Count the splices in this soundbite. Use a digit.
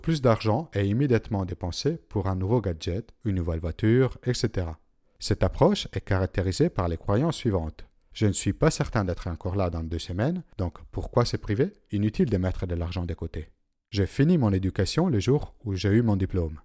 0